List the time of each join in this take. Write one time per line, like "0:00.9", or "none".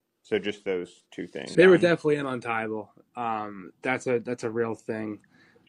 0:01.5

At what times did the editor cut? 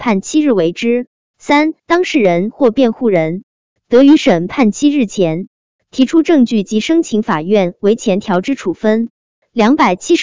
0:01.3

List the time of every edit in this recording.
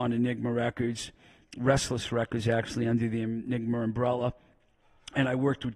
none

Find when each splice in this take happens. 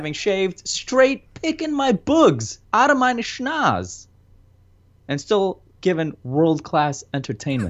0:02.6

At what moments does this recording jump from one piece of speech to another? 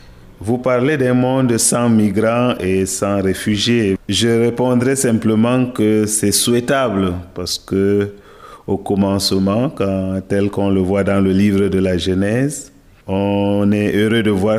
0:04.0

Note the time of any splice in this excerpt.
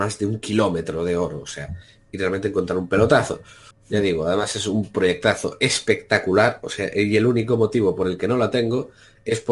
0:03.7

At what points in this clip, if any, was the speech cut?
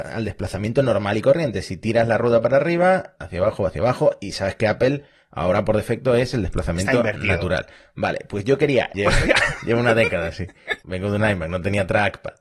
0:03.2
0:08.9
0:10.8

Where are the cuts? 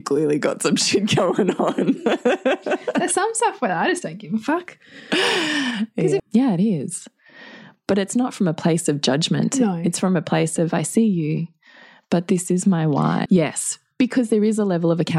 0:06.2
0:13.3

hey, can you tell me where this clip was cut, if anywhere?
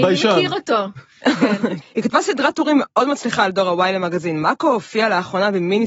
0:01.8

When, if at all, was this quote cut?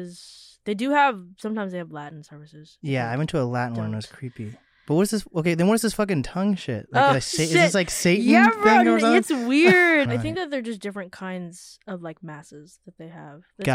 0:10.1

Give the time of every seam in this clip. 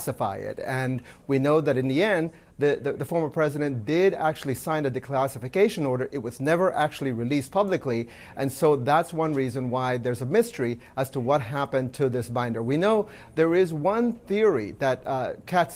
none

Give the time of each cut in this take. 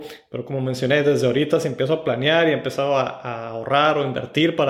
none

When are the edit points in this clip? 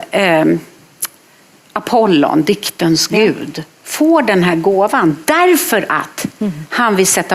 none

